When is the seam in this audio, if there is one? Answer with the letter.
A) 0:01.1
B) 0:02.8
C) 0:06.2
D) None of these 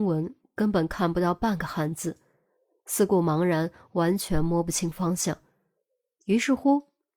C